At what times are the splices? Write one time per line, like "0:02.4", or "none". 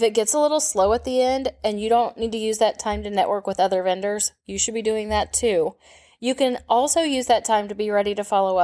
none